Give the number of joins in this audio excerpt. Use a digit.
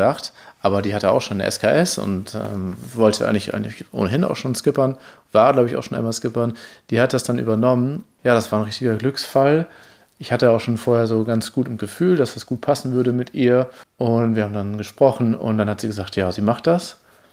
0